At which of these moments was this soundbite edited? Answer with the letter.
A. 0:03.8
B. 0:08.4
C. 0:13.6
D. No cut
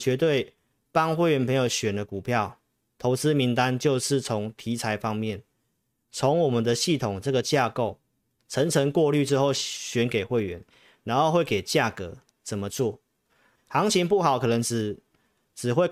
C